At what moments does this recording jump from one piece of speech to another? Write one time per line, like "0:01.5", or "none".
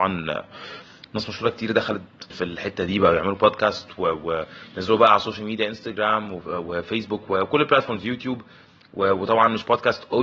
0:02.3